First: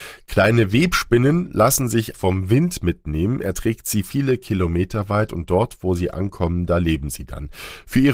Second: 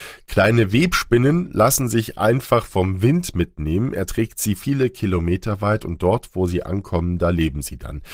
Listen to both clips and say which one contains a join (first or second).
first